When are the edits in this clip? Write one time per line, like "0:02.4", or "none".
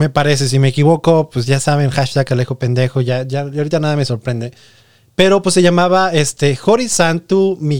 none